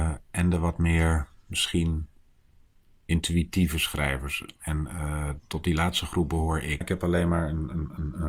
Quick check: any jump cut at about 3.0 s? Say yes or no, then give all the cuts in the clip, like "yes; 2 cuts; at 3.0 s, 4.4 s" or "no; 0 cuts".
no; 2 cuts; at 5.4 s, 6.8 s